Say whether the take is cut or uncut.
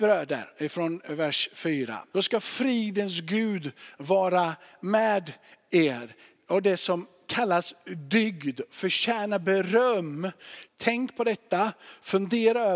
cut